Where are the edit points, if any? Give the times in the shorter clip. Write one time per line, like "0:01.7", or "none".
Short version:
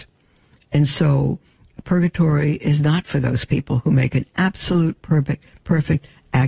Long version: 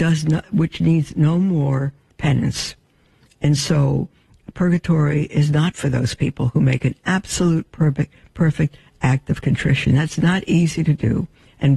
none